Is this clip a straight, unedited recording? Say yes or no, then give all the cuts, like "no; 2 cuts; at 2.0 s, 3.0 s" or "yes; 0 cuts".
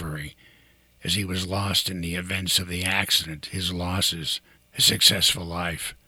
no; 1 cut; at 4.6 s